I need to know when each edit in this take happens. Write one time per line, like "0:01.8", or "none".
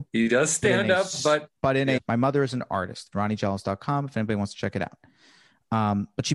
0:02.0
0:03.1